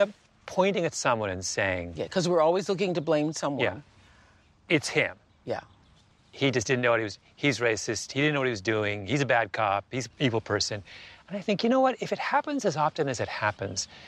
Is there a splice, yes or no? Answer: no